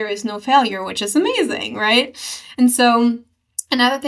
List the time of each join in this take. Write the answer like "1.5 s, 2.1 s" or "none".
none